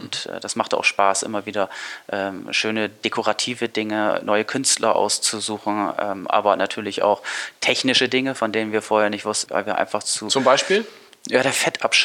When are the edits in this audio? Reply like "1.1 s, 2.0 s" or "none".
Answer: 9.5 s